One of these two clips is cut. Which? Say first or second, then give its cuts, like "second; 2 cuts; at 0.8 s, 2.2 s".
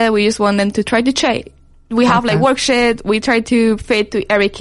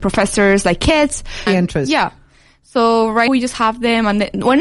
second; 2 cuts; at 1.5 s, 3.3 s